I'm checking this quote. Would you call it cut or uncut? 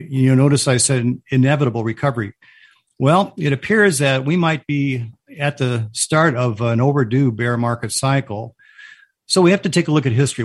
uncut